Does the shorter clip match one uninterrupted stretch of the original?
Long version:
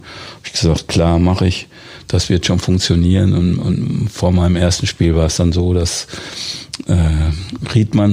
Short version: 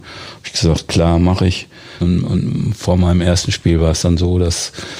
no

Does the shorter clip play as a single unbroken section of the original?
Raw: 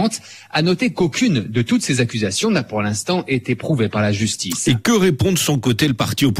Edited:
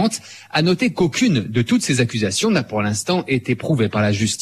yes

